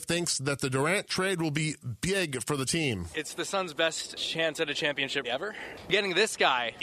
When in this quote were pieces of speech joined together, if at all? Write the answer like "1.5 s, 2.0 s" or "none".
5.2 s